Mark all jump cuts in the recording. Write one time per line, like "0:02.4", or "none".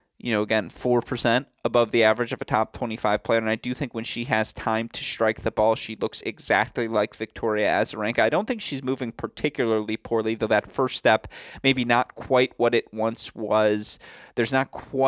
none